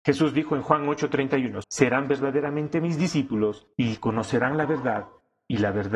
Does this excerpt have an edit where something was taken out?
yes; 2 cuts; at 1.6 s, 3.7 s

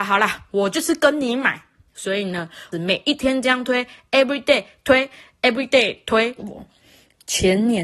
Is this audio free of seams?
no; 2 cuts; at 2.7 s, 6.4 s

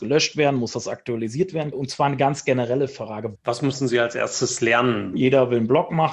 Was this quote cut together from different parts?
yes; 3 cuts; at 1.7 s, 3.4 s, 5.1 s

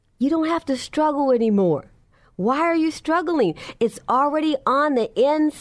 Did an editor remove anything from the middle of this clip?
no; 0 cuts

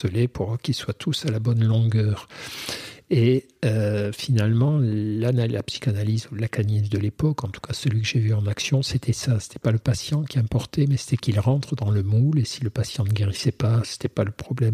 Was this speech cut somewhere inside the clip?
no; 0 cuts

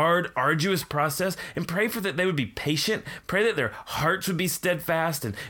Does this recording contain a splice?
no; 0 cuts

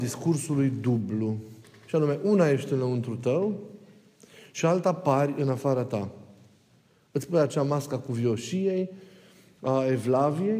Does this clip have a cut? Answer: no; 0 cuts

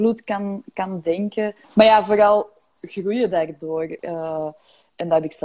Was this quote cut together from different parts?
yes; 2 cuts; at 1.6 s, 4.0 s

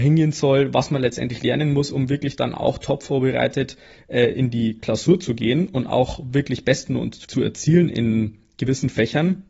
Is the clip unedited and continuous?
no; 1 cut; at 7.2 s

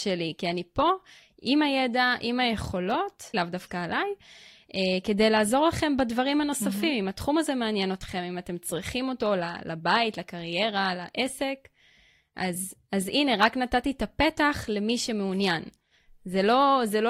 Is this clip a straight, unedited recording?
no; 1 cut; at 3.3 s

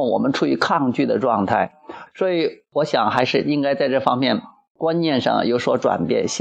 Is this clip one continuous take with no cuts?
no; 1 cut; at 2.1 s

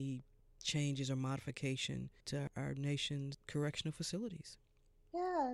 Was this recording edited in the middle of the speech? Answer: yes; 1 cut; at 2.2 s

